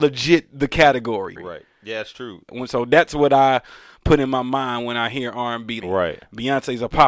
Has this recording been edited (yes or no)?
yes